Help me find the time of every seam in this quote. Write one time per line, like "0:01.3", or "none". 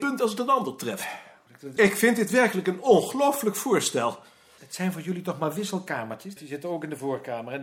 0:01.8
0:04.6
0:06.4